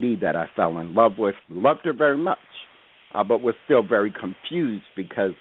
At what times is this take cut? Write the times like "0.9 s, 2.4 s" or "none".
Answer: 1.4 s